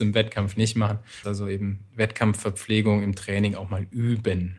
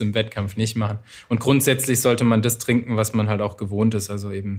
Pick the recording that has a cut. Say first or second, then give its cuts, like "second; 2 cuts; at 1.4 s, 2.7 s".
first; 1 cut; at 1.2 s